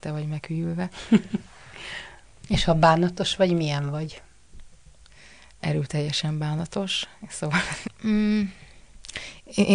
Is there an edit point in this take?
yes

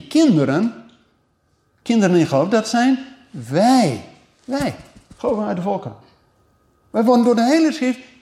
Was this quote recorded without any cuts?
yes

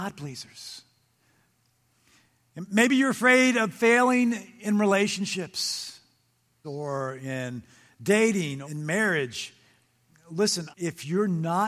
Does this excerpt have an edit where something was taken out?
yes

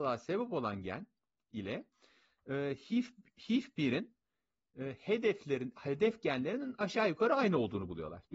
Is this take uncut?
yes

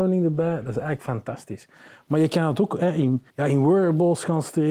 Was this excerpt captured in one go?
no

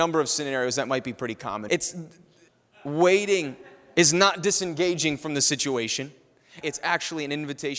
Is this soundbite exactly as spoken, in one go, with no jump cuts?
no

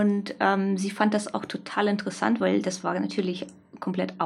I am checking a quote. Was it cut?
no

